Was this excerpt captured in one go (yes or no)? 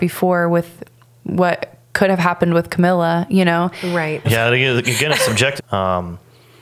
no